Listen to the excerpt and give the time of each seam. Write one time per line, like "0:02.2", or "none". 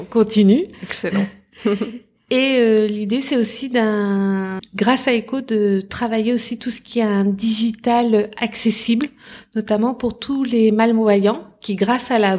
0:04.6